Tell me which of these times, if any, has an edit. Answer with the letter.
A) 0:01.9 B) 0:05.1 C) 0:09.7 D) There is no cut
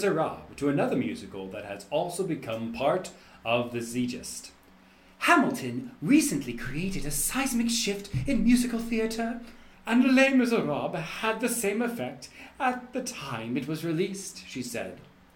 C